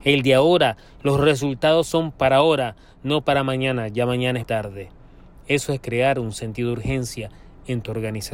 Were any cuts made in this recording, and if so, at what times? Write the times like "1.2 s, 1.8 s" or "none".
4.4 s